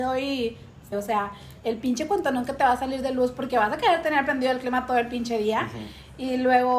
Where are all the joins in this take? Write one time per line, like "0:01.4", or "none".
0:00.9